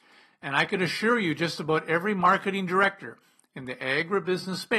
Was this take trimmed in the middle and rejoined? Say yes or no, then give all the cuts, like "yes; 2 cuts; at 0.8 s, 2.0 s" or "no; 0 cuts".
no; 0 cuts